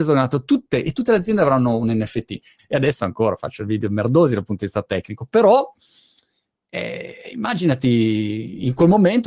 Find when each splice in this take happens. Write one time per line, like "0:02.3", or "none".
0:02.6